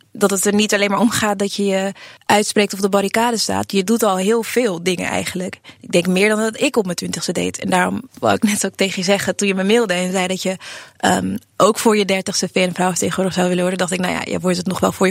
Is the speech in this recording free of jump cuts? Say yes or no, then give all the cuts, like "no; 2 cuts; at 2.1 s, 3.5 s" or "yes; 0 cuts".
yes; 0 cuts